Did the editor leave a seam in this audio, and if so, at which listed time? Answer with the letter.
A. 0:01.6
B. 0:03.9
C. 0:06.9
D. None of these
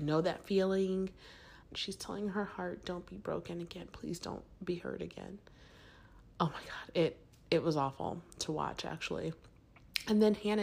A